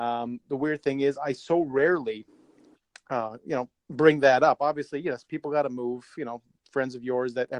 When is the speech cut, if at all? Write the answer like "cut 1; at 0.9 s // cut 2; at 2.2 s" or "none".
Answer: none

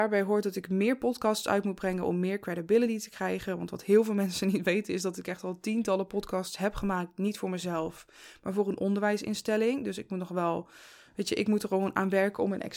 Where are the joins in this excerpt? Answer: none

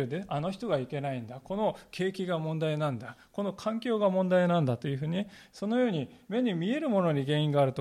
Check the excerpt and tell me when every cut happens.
none

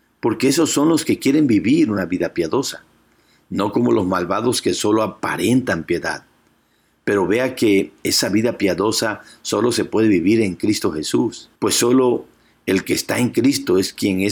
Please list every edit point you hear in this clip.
cut 1; at 11.6 s

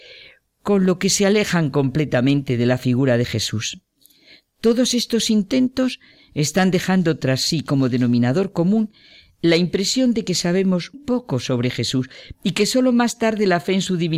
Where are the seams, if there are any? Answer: cut 1; at 10.9 s

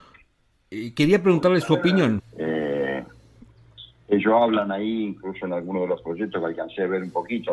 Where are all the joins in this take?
cut 1; at 2.2 s

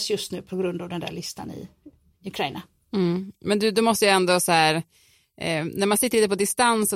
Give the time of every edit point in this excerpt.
none

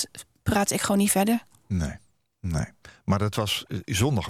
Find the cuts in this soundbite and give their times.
none

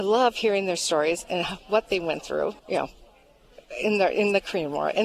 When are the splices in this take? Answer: cut 1; at 2.6 s

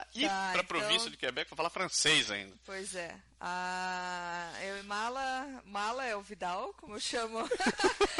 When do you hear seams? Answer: none

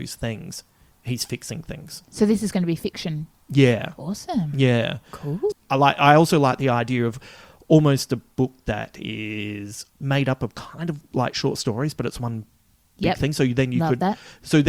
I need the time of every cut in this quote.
cut 1; at 5.5 s // cut 2; at 9.9 s

